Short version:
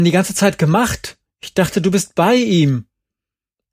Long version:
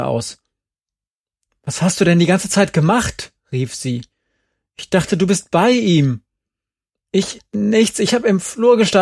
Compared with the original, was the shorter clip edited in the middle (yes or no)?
yes